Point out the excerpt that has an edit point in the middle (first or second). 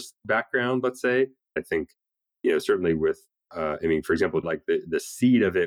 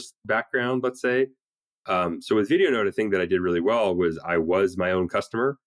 first